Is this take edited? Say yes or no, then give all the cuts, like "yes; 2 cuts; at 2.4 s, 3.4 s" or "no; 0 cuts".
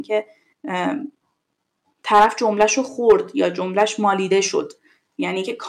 no; 0 cuts